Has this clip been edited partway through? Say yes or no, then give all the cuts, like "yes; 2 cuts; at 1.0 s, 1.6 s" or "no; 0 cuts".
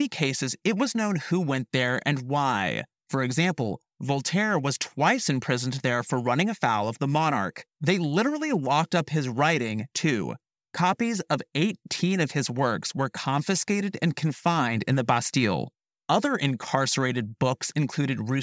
yes; 1 cut; at 7.8 s